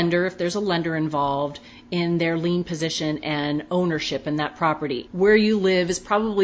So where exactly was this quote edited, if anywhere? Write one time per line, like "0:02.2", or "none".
0:05.1